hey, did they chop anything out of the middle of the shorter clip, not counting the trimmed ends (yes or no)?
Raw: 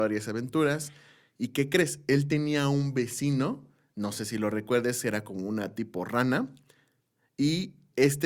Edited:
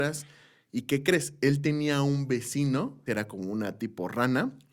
yes